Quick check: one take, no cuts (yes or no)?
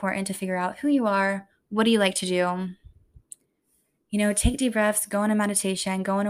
yes